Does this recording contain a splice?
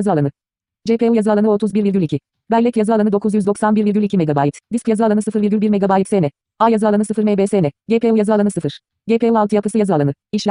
no; 0 cuts

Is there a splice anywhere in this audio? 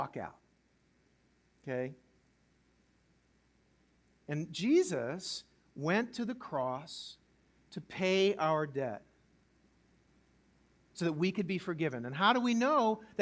no; 0 cuts

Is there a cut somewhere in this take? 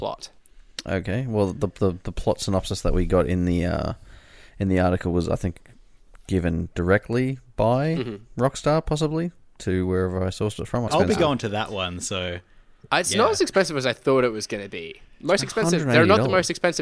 yes; 1 cut; at 10.9 s

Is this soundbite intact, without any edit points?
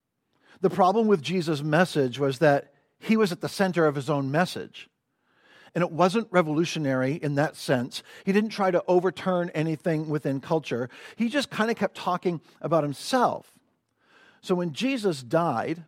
no; 1 cut; at 5.7 s

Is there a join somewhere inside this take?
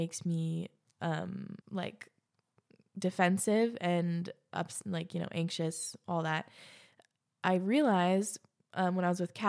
yes; 1 cut; at 1.6 s

